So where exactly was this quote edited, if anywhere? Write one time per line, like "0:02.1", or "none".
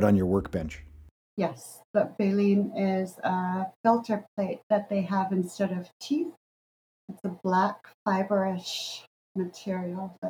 0:01.2